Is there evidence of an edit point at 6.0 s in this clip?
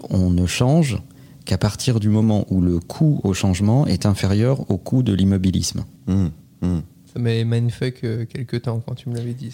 yes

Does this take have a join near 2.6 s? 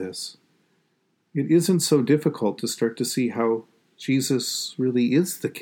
yes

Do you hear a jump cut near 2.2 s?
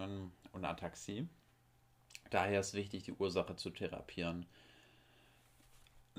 no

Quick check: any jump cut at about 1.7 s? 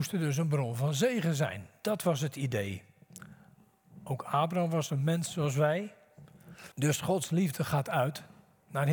no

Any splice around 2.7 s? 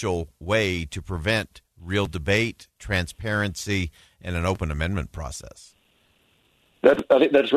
no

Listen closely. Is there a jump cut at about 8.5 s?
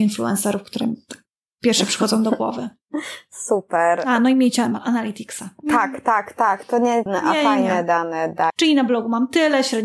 yes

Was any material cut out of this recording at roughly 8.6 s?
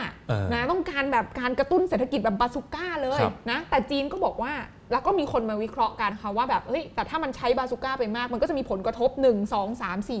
no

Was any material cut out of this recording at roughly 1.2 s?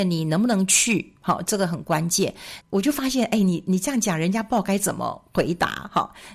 no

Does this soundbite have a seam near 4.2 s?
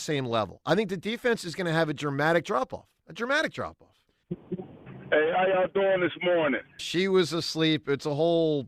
yes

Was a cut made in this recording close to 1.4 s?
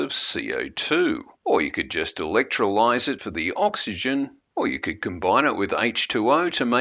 yes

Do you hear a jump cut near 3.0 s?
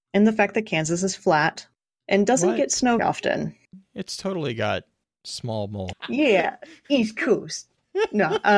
yes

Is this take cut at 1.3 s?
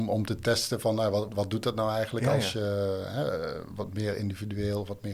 yes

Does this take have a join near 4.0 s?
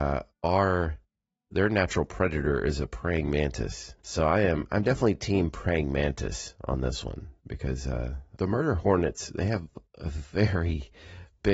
yes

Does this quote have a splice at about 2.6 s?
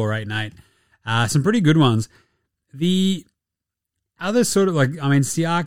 no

